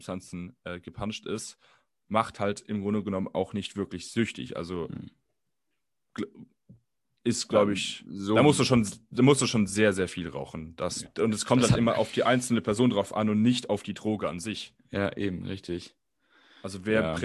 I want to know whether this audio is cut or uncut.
cut